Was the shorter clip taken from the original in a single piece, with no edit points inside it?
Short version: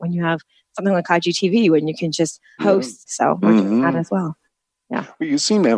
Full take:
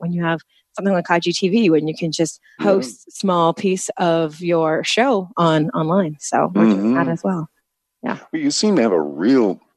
no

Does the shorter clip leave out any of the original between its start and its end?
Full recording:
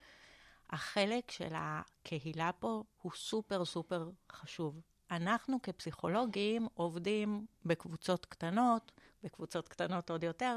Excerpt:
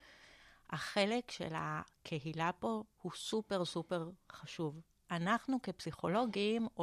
no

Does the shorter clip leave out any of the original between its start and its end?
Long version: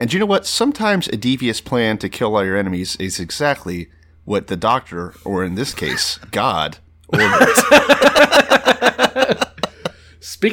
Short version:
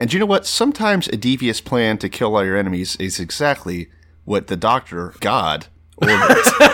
yes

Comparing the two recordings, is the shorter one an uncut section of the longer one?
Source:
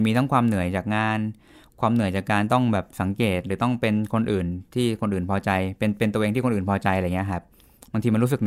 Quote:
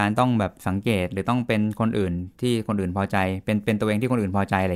yes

